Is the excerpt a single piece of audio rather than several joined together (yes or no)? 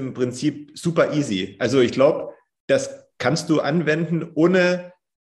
yes